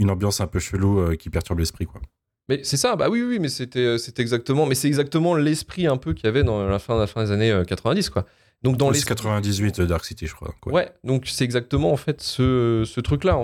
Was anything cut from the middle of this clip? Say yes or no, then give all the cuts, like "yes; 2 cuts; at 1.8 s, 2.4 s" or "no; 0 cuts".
no; 0 cuts